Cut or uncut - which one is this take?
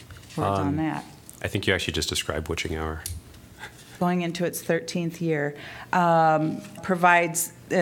cut